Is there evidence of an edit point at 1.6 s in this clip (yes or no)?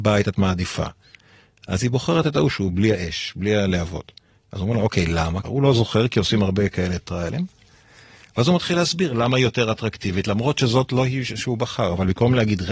no